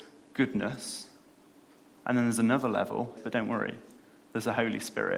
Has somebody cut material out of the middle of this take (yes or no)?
yes